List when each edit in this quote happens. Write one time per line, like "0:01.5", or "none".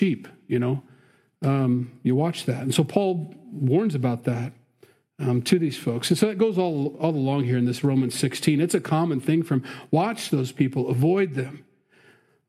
none